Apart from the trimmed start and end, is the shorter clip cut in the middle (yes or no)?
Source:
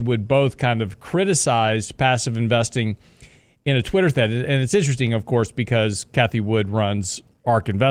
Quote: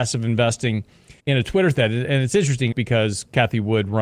yes